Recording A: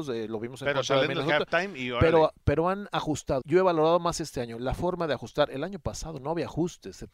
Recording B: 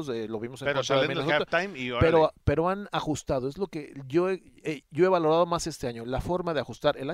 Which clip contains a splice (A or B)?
A